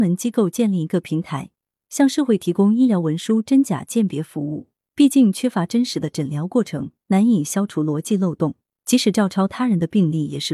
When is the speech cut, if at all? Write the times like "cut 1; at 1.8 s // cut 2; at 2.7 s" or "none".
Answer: cut 1; at 4.9 s